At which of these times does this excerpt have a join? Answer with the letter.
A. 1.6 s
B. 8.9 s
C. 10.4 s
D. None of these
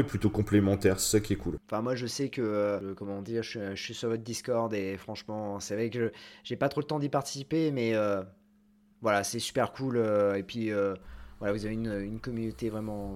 A